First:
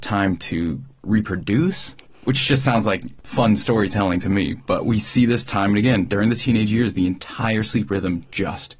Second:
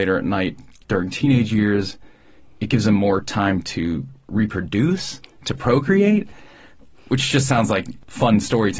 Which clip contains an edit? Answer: first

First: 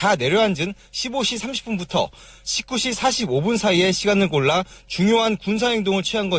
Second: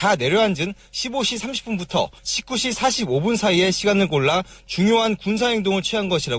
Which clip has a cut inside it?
second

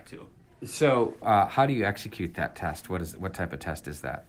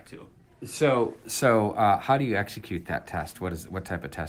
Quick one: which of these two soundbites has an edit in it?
first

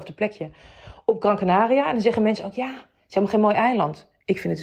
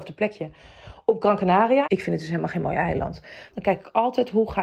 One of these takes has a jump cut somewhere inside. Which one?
second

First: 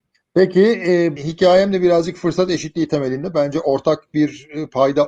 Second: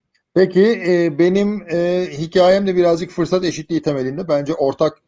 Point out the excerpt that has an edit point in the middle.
first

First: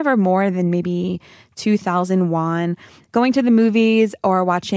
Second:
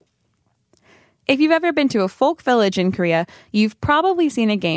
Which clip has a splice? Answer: first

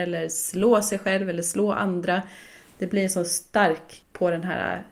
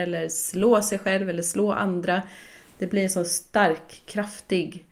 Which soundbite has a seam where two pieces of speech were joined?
first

